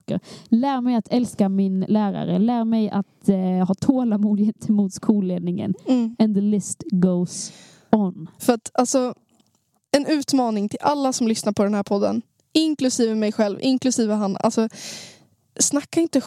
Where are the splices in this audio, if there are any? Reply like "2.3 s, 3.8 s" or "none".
8.4 s